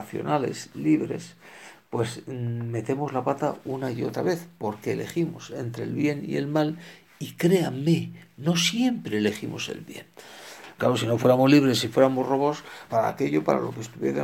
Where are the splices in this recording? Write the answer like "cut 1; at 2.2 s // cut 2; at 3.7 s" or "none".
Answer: cut 1; at 10.8 s // cut 2; at 12.9 s